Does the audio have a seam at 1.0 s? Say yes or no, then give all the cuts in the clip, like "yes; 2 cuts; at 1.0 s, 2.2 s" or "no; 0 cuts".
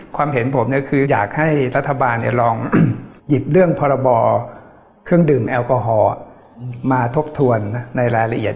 yes; 2 cuts; at 1.0 s, 3.2 s